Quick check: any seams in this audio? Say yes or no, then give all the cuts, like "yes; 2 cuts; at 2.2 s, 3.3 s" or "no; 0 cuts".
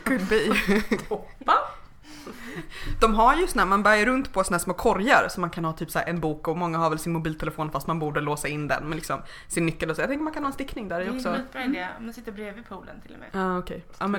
yes; 1 cut; at 13.3 s